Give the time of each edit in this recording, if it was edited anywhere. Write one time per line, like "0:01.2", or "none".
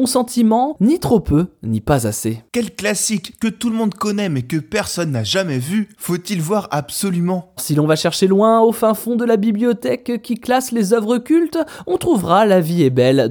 0:07.6